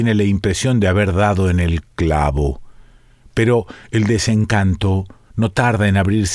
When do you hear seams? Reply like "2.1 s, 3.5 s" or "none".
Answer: none

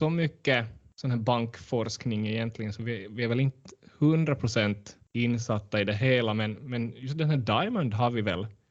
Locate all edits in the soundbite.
none

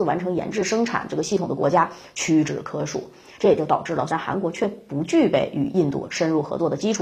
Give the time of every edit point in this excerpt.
4.1 s

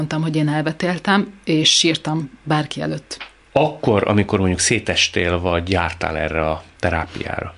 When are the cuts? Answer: none

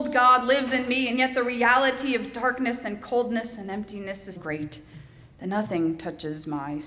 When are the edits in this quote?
4.4 s

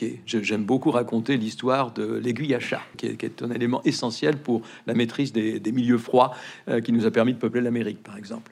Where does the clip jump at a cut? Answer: 2.9 s

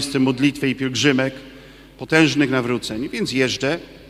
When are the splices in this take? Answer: none

